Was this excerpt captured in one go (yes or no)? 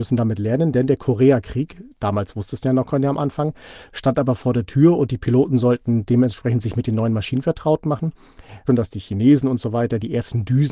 no